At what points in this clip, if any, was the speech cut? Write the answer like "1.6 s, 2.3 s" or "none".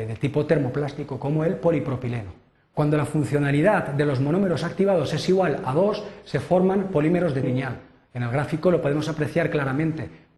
2.6 s, 7.4 s